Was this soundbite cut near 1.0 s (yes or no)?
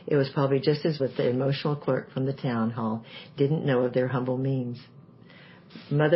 yes